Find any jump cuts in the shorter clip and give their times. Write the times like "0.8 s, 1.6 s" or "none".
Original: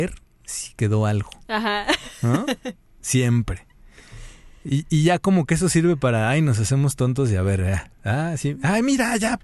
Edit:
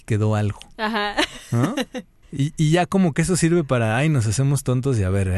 2.2 s